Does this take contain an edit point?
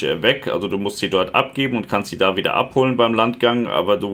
no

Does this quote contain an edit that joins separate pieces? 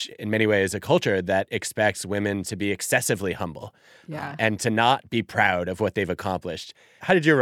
no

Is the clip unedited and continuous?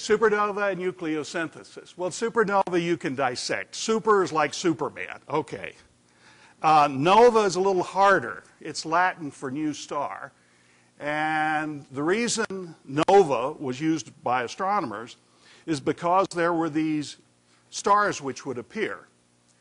yes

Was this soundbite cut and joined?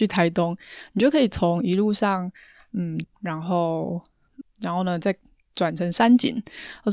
yes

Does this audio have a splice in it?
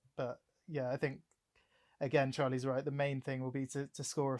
no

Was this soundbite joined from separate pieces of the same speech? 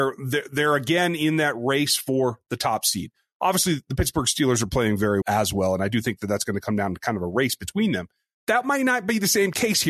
yes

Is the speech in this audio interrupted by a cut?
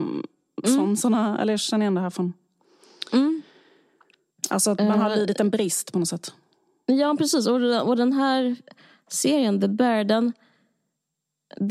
no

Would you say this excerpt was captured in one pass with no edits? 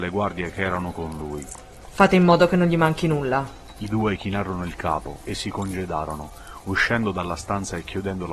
no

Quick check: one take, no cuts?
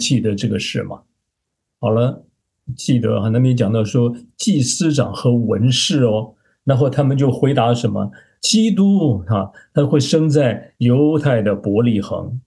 yes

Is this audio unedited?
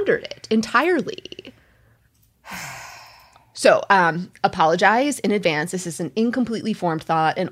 yes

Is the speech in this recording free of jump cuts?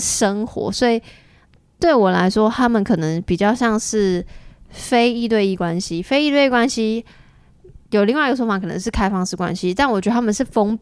yes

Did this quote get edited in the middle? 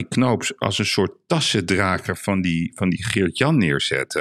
yes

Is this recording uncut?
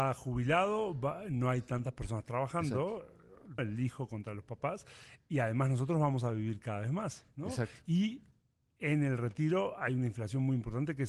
no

